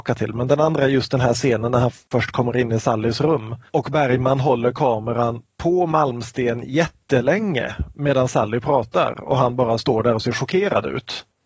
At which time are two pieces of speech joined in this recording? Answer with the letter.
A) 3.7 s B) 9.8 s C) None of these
A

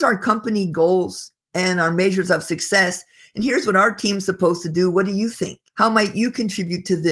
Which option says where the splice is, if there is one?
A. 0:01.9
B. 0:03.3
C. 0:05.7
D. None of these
C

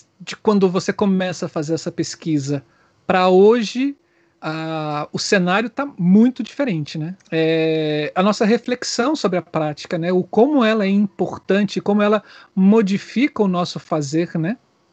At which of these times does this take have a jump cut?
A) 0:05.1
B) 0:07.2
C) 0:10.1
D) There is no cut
B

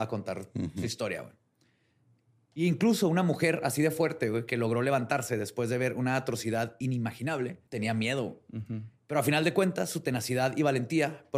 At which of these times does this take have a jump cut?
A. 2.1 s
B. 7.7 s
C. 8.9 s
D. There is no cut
B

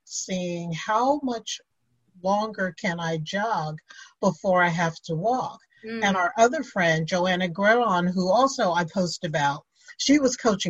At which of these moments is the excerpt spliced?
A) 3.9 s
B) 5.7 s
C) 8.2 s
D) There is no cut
D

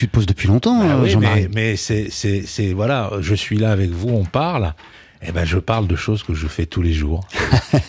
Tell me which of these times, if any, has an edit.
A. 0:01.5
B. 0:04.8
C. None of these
C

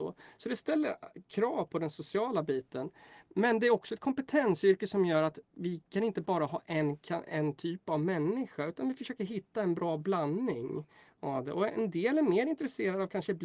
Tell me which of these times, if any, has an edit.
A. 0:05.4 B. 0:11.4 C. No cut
A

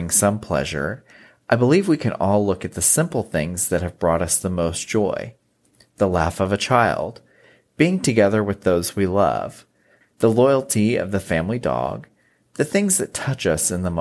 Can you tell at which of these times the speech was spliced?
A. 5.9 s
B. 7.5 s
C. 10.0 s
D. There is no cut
C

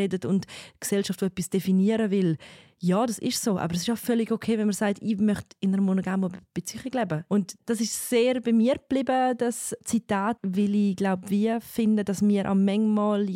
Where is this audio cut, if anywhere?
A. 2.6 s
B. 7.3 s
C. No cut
B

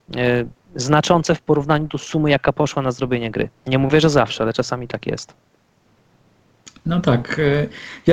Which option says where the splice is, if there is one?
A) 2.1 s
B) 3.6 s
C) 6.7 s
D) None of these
B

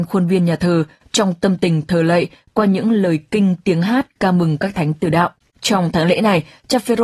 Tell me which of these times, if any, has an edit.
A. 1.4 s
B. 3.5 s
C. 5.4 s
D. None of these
C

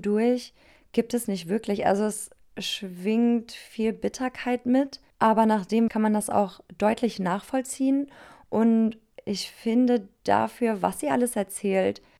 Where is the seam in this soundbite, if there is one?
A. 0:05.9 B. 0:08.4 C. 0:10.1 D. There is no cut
A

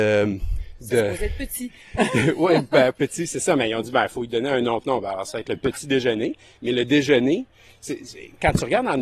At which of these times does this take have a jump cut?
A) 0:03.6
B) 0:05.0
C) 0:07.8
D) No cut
D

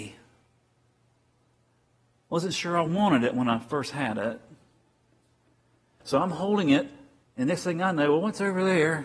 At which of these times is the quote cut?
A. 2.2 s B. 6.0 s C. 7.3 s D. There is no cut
B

